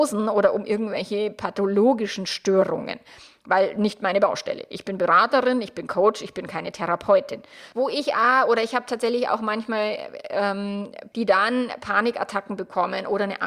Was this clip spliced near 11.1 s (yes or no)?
yes